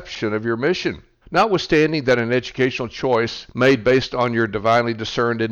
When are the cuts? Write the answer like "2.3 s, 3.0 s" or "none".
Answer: 1.2 s, 3.5 s